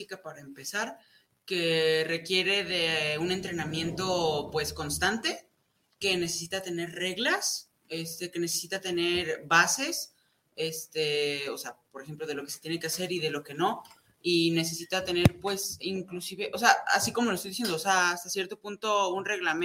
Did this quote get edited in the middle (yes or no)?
no